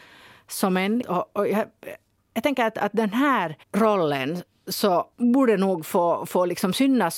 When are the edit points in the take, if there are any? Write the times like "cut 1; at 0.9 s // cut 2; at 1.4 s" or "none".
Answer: cut 1; at 1.0 s // cut 2; at 3.6 s // cut 3; at 5.1 s